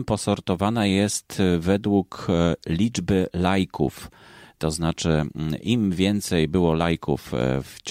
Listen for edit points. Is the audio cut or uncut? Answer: uncut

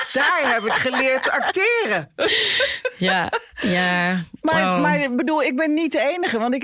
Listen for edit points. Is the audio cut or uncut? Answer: uncut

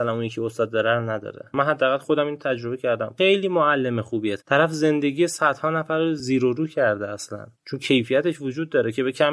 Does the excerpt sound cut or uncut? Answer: cut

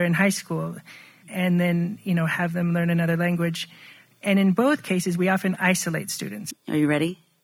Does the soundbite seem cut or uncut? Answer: cut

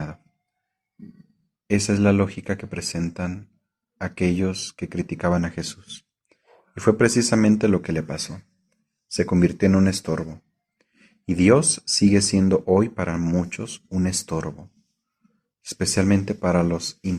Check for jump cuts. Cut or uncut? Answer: uncut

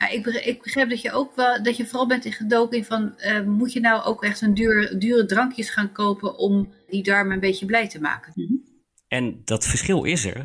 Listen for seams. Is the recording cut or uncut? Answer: cut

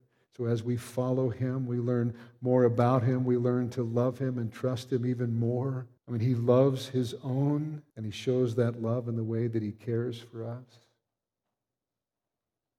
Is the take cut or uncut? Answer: cut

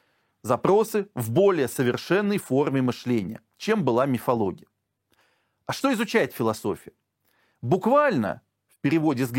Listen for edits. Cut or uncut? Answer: uncut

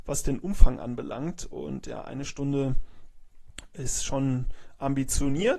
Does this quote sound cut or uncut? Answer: uncut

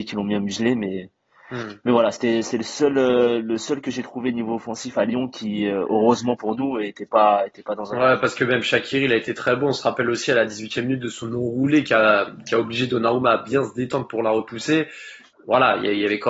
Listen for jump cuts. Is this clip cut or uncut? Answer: uncut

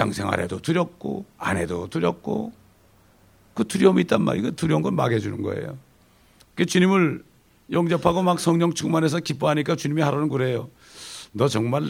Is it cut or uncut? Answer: cut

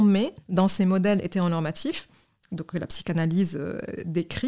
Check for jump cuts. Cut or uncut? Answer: uncut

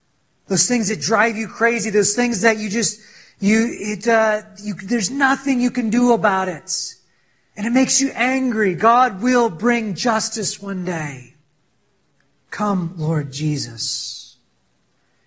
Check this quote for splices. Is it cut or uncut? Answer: cut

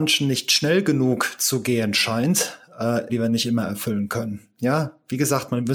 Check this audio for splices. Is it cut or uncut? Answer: cut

